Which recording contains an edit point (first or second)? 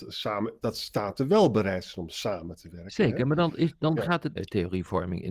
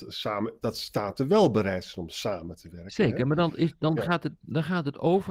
first